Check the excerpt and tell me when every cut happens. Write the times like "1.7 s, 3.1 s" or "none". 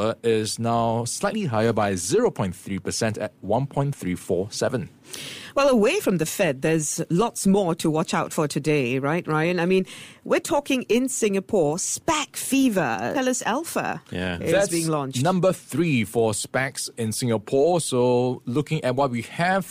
13.1 s